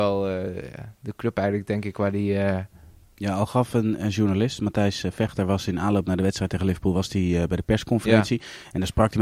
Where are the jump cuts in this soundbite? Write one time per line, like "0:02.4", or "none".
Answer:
none